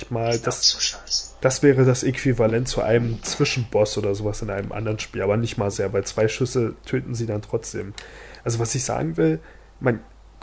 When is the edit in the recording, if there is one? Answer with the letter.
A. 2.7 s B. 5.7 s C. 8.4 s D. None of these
B